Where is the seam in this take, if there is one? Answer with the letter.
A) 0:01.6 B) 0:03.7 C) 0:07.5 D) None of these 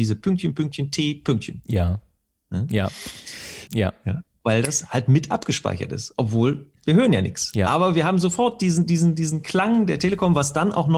B